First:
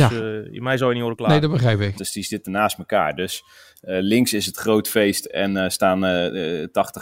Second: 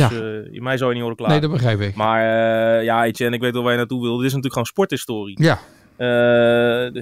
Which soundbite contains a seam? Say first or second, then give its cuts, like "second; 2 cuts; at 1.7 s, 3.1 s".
first; 1 cut; at 1.9 s